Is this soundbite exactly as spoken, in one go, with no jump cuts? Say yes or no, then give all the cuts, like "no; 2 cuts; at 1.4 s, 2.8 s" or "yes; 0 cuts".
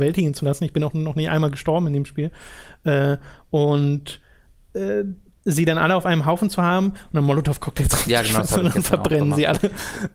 yes; 0 cuts